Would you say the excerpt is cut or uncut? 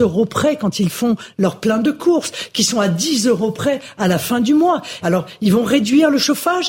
cut